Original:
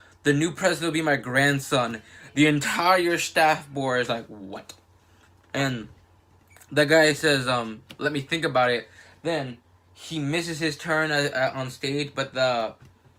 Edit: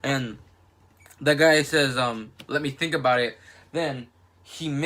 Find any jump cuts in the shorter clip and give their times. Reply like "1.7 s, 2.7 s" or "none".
none